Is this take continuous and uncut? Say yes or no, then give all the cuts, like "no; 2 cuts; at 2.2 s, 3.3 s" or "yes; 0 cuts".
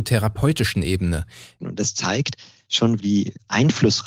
no; 2 cuts; at 1.6 s, 3.0 s